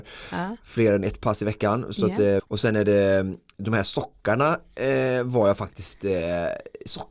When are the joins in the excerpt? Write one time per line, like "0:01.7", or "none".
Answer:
0:02.4